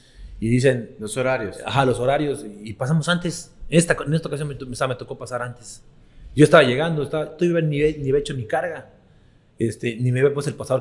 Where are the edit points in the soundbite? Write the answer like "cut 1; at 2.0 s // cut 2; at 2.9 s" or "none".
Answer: none

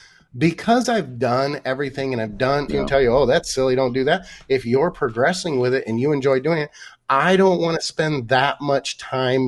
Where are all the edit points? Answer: cut 1; at 2.7 s

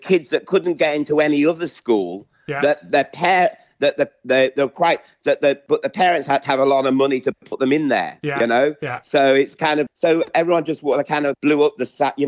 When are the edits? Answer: cut 1; at 9.9 s // cut 2; at 11.3 s

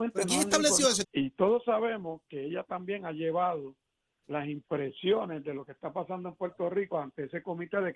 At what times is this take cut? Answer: cut 1; at 1.0 s

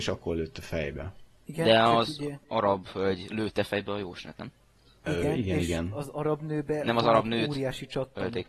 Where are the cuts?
none

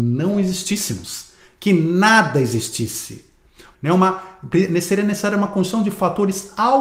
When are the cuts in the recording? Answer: cut 1; at 3.7 s

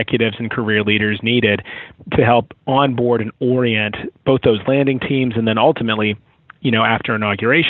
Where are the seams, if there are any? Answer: none

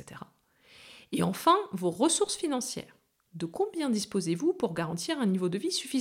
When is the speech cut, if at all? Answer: none

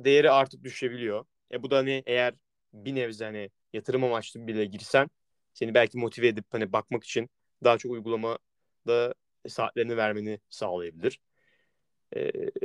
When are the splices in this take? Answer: none

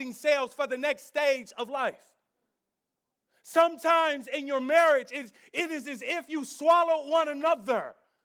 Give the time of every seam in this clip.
none

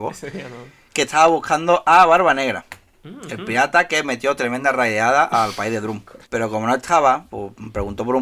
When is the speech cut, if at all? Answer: cut 1; at 6.3 s

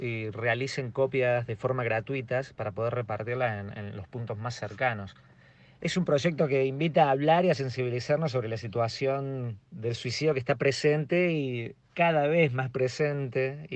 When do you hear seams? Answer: cut 1; at 5.8 s // cut 2; at 9.6 s

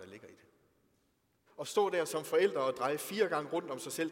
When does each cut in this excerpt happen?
cut 1; at 1.5 s

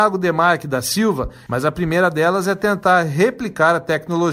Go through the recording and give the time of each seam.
cut 1; at 1.5 s

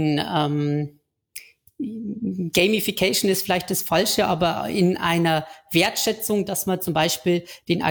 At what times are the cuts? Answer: none

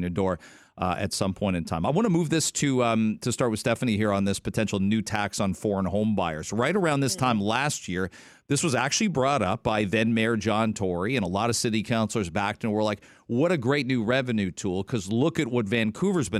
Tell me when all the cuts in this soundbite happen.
none

